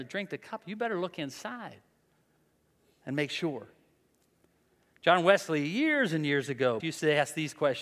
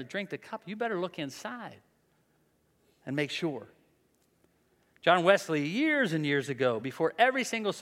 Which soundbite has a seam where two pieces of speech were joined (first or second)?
first